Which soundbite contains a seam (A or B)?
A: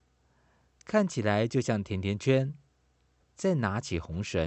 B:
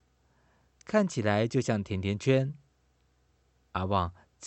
A